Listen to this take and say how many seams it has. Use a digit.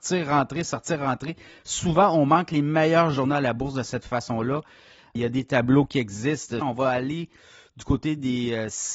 2